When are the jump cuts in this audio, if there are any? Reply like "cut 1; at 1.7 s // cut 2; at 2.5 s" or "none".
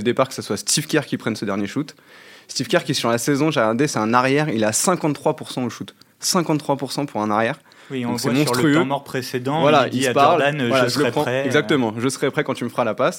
none